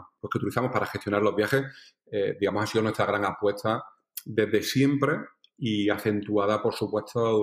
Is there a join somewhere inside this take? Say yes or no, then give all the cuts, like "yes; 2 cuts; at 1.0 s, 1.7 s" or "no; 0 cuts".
no; 0 cuts